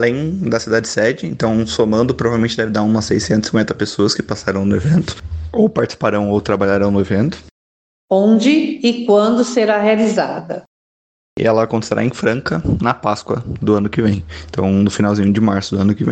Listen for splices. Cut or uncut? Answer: uncut